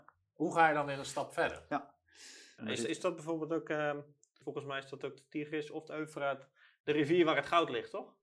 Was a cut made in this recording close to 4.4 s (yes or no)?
yes